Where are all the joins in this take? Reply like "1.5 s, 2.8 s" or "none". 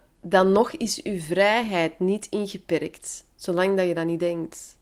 none